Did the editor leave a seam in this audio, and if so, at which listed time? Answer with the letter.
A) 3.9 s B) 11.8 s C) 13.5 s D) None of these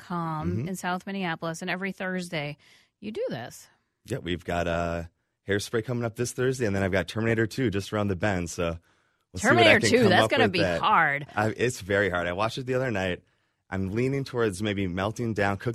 D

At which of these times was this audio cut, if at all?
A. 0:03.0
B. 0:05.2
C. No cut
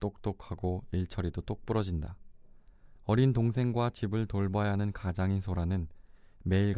A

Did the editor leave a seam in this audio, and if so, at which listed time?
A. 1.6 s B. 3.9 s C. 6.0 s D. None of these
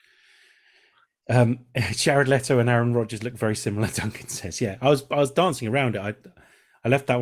D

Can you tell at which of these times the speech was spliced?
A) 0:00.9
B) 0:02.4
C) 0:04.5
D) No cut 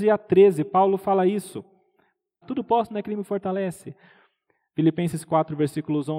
B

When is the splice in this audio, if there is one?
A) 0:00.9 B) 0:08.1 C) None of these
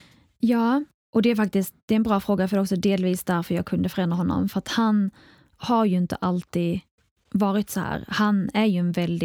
A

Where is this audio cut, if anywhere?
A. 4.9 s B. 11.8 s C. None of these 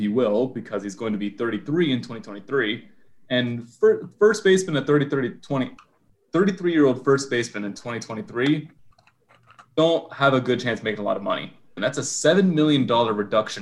B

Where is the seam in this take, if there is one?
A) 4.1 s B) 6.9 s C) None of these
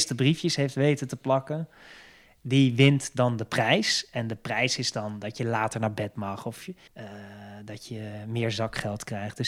B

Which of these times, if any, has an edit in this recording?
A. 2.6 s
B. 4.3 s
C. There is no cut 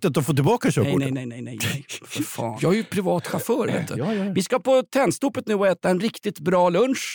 A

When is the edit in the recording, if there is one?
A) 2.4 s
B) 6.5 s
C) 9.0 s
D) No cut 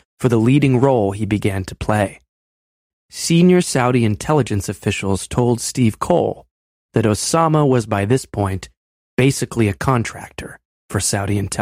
D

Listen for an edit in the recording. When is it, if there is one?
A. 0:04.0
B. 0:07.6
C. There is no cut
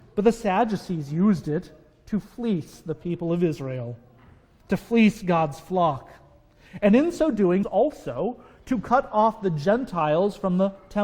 B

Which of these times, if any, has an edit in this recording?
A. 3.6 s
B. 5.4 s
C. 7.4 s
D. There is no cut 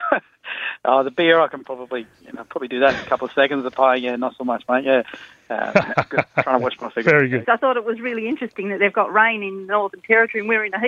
C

